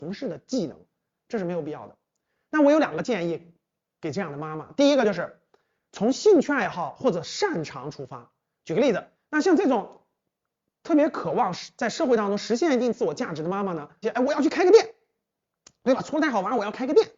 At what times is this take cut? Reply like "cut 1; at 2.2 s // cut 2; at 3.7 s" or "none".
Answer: cut 1; at 9.1 s // cut 2; at 14.0 s

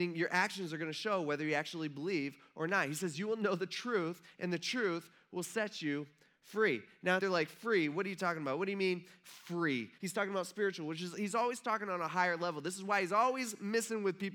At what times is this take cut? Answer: cut 1; at 7.2 s // cut 2; at 10.0 s

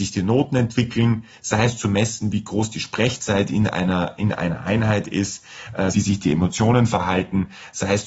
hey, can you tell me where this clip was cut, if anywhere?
cut 1; at 5.9 s

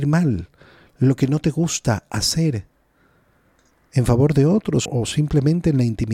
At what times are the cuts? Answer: cut 1; at 4.9 s

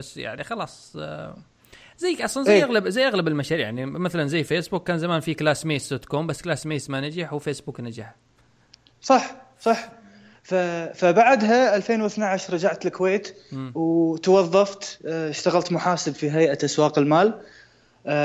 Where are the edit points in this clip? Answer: none

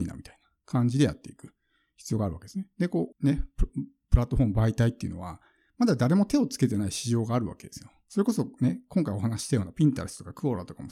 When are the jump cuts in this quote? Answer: cut 1; at 3.1 s

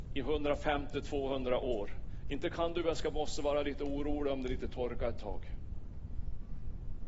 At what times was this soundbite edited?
cut 1; at 2.2 s

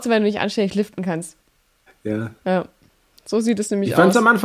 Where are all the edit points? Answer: cut 1; at 1.9 s

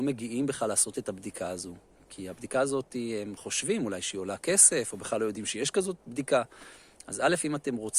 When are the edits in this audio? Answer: none

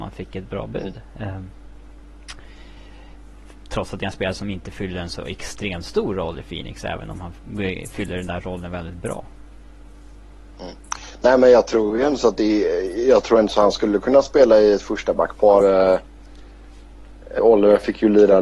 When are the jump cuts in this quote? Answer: cut 1; at 15.6 s // cut 2; at 17.4 s

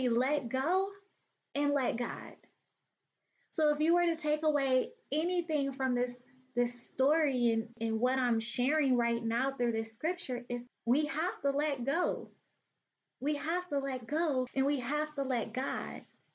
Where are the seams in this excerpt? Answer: none

